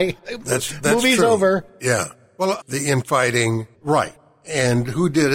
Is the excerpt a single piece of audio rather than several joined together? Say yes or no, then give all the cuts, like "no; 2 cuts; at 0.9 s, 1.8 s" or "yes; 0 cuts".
no; 2 cuts; at 2.6 s, 3.7 s